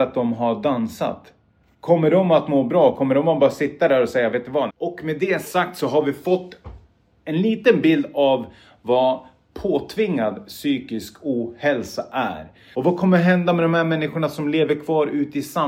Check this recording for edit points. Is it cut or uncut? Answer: cut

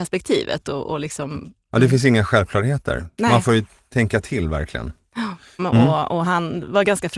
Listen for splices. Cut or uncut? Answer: cut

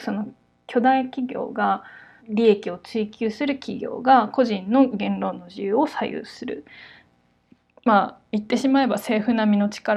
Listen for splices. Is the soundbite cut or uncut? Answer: cut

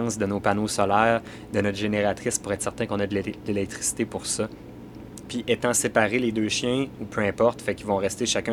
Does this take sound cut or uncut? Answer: cut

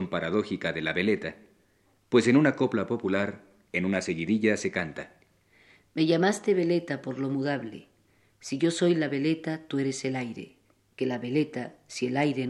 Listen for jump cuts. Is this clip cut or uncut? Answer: uncut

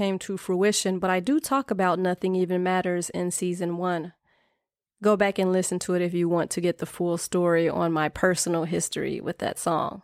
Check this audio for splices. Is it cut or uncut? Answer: uncut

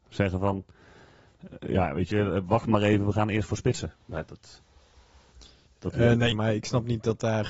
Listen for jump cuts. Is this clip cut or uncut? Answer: cut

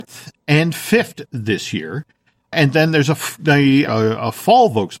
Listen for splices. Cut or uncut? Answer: cut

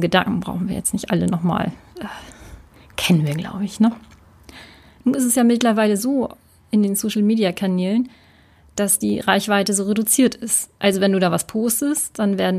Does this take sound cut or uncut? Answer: uncut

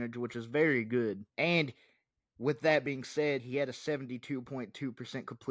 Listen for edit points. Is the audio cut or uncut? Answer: cut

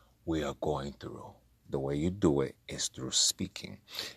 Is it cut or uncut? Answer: cut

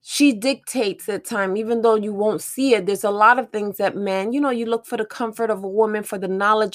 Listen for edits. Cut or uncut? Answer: uncut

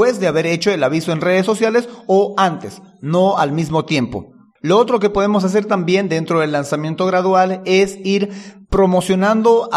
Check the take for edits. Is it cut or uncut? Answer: cut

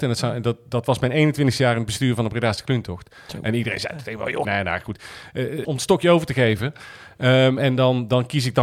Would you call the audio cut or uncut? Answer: cut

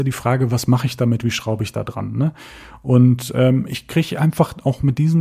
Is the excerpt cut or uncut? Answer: uncut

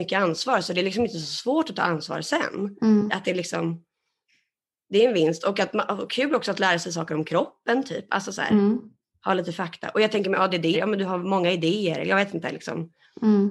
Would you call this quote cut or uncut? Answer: cut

